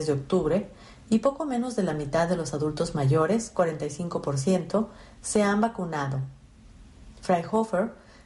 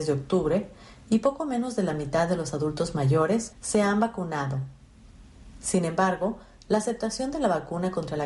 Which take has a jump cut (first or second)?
second